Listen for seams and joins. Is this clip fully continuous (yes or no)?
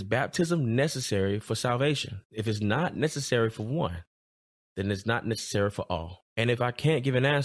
no